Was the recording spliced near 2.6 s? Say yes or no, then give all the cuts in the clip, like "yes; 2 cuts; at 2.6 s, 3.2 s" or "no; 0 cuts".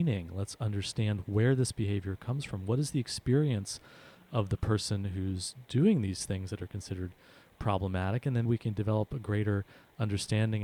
no; 1 cut; at 8.5 s